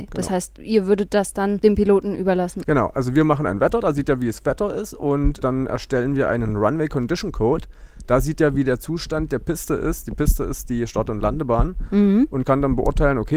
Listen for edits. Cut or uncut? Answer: uncut